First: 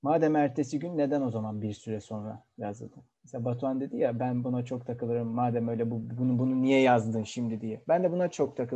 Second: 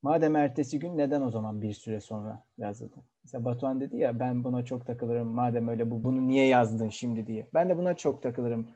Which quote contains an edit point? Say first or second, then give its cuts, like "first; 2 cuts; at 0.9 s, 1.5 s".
second; 1 cut; at 6.0 s